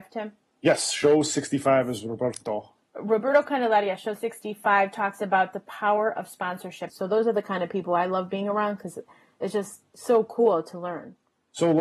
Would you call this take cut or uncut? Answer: cut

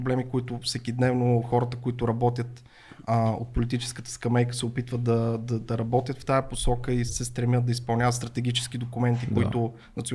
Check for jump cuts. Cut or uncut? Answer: cut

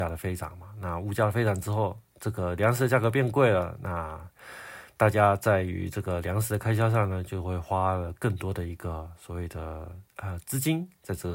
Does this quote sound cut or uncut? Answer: cut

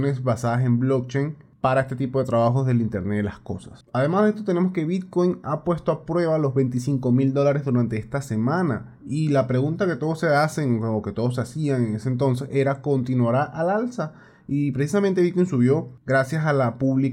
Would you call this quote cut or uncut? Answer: uncut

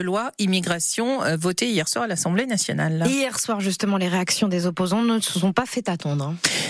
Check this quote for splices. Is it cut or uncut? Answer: uncut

